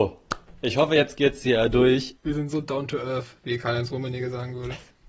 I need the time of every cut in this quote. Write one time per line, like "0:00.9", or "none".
0:02.2